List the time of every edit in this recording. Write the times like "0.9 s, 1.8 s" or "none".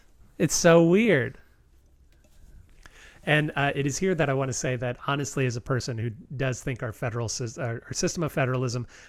none